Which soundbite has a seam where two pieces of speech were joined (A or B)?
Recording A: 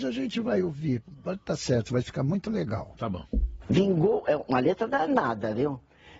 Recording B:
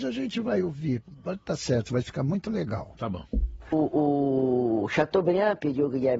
A